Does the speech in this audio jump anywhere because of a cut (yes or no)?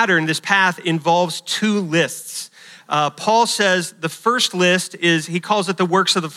no